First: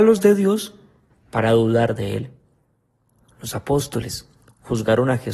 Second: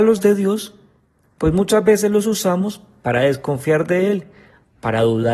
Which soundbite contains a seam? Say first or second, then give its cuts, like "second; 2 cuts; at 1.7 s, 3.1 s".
first; 1 cut; at 1.1 s